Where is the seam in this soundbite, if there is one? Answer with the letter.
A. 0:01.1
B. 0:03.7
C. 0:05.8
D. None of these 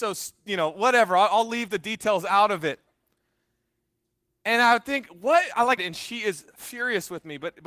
C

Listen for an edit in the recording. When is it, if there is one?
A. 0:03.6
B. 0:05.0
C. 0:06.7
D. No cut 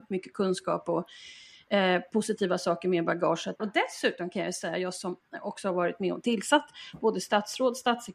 A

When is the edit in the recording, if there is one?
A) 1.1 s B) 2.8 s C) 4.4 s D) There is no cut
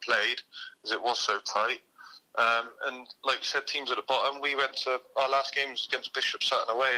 D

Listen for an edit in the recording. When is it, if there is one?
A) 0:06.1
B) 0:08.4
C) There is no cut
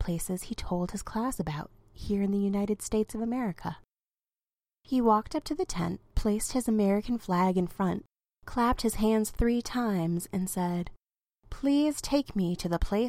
A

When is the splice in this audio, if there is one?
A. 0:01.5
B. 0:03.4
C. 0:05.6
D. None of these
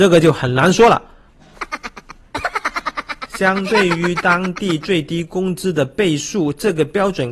A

